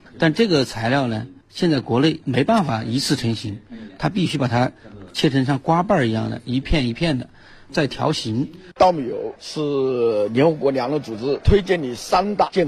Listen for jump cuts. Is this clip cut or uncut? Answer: cut